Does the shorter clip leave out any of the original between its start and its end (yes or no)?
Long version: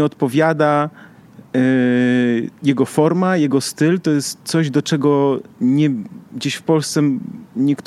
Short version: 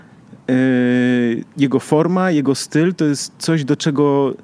no